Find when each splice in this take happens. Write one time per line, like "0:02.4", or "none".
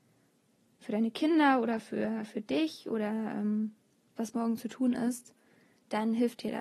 0:04.2